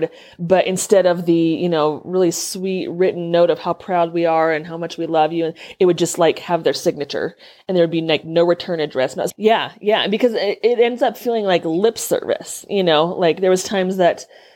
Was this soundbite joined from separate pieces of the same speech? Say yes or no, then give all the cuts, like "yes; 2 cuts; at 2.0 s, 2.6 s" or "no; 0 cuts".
yes; 1 cut; at 9.3 s